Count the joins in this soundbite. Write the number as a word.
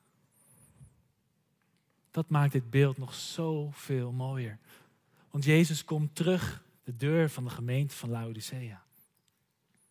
one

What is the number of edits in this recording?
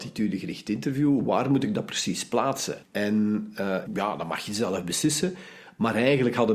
two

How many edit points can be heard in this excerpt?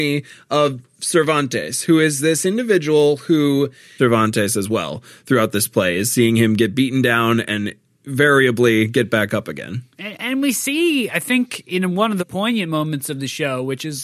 two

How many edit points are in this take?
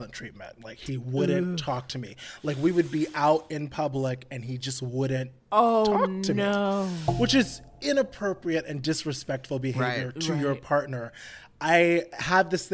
zero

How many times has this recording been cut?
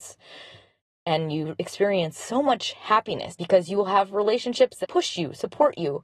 two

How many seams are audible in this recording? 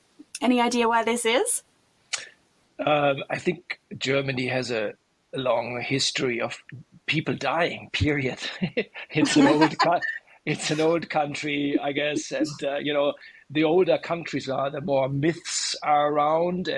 zero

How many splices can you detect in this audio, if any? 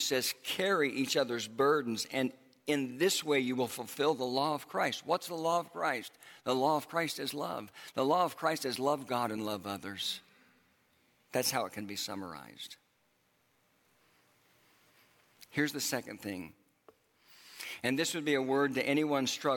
zero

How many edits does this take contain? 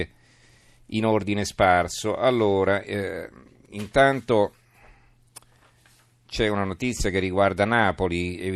zero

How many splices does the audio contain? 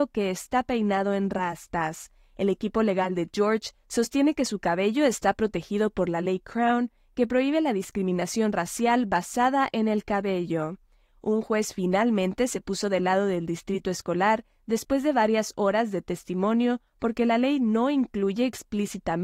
zero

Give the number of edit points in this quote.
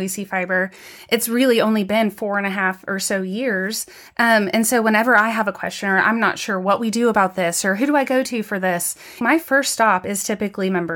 one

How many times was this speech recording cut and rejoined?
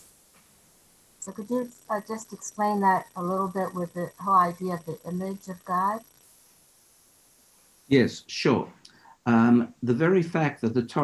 zero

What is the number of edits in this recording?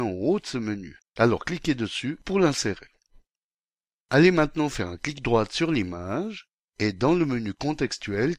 one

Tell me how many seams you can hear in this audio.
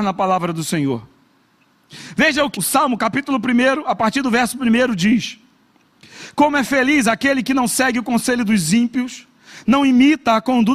one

